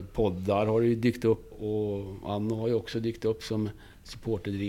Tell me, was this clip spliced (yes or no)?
yes